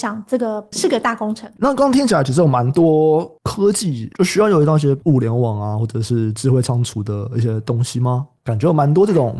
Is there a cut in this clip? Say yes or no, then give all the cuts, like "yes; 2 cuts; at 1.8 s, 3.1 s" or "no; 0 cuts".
yes; 2 cuts; at 1.6 s, 8.4 s